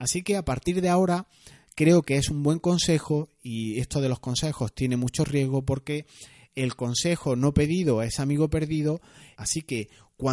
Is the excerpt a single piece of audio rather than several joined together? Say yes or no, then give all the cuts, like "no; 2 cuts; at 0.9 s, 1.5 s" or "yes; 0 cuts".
no; 1 cut; at 9.4 s